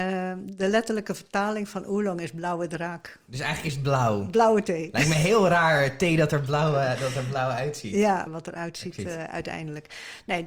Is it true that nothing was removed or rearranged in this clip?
no; 1 cut; at 8.3 s

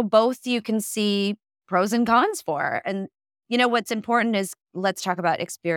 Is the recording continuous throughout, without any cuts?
yes; 0 cuts

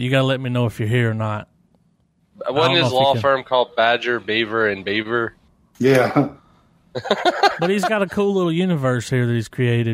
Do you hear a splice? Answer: no; 0 cuts

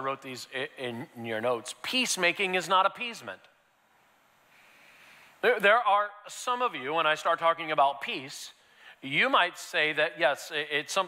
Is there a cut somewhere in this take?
no; 0 cuts

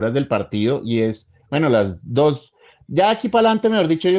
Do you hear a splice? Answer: no; 0 cuts

